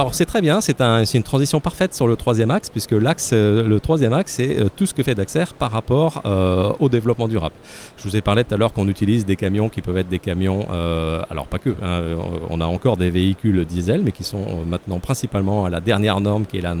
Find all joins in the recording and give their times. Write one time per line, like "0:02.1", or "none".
none